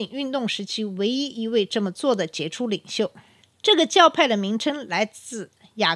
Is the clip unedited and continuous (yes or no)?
yes